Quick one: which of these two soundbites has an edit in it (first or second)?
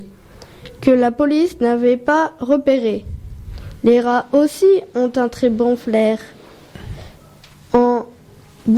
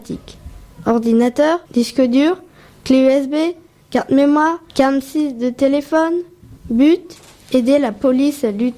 second